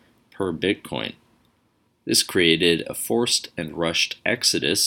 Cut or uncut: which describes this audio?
cut